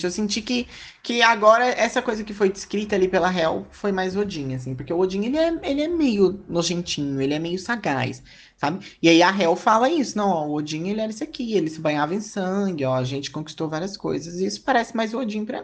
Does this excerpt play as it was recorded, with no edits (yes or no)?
yes